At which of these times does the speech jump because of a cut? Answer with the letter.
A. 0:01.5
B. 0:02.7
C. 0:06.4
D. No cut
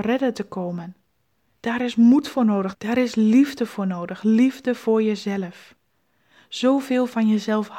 B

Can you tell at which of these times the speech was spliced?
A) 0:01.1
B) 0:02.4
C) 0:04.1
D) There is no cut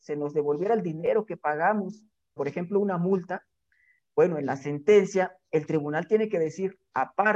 B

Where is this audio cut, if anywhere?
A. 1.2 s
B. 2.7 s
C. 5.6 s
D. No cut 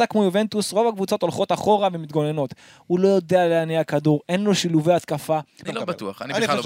C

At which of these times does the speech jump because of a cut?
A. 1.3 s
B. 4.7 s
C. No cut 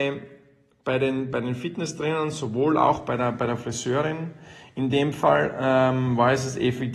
C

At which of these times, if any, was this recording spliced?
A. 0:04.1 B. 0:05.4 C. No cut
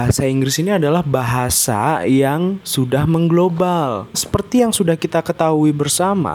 A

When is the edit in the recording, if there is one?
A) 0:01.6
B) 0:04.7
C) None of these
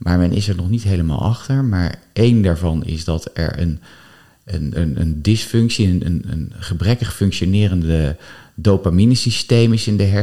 B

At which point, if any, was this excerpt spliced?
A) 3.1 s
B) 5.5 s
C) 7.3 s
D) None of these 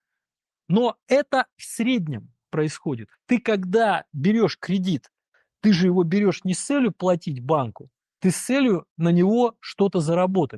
A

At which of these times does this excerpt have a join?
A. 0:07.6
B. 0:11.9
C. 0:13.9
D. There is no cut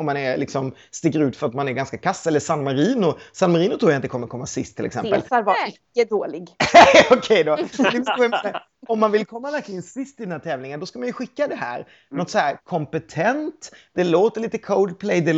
D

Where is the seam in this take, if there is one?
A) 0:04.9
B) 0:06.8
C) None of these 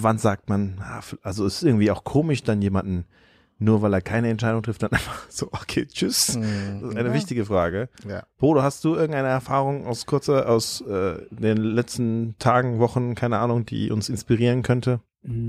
B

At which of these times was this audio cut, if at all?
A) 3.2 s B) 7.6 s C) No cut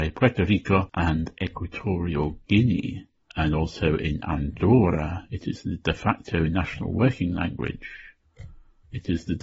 C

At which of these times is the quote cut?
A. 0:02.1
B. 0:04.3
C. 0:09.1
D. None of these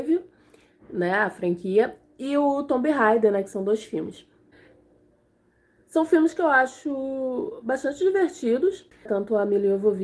C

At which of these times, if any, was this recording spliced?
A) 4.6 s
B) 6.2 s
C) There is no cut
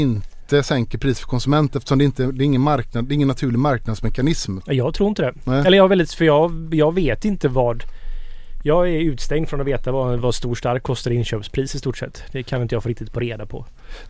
A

